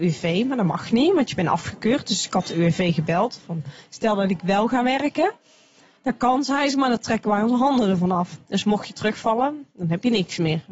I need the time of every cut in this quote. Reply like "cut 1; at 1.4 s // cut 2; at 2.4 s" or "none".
none